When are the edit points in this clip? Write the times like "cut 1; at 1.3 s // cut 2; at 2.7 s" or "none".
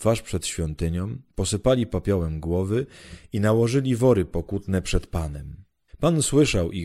cut 1; at 5.9 s